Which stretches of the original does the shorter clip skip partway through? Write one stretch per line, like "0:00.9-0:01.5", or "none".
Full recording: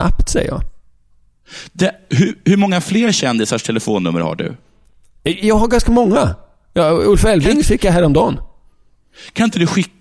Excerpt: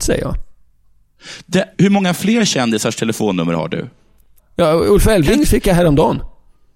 0:02.0-0:02.4
0:05.1-0:06.6